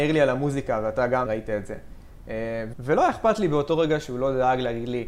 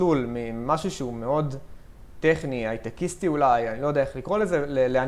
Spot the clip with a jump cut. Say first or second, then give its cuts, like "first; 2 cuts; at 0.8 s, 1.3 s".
first; 2 cuts; at 1.3 s, 2.7 s